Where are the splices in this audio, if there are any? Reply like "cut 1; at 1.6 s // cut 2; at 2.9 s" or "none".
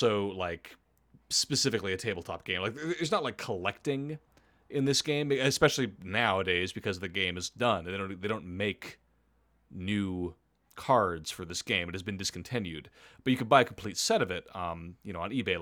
none